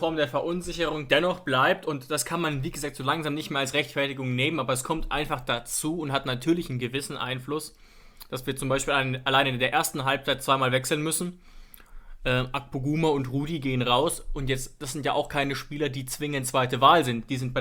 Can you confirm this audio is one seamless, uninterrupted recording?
yes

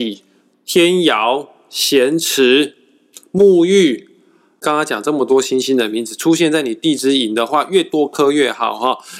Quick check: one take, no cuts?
yes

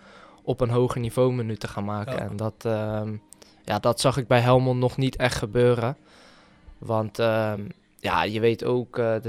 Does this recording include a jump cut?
no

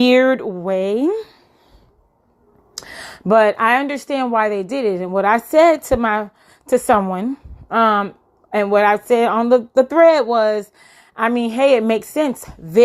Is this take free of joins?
yes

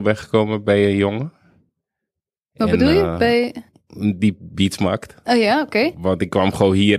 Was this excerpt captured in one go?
yes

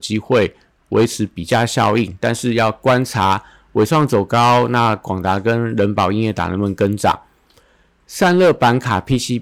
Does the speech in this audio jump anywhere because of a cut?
no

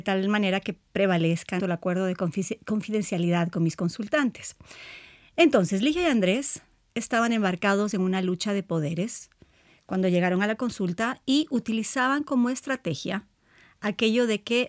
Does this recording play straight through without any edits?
no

